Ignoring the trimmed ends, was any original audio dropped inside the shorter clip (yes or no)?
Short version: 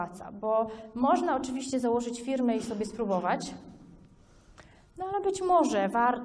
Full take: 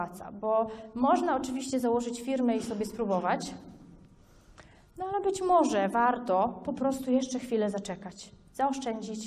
no